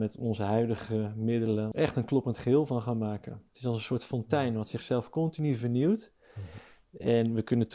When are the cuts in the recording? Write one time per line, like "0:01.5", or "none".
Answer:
0:01.7
0:03.5